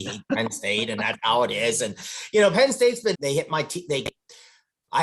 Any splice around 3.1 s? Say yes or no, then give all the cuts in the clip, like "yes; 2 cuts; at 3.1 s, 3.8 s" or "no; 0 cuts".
yes; 1 cut; at 3.1 s